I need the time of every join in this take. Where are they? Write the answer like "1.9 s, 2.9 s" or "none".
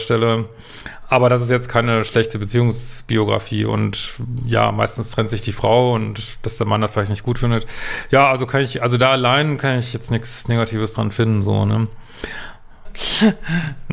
12.8 s